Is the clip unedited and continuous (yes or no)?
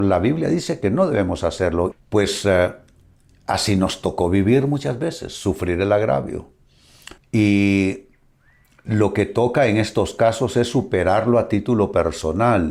no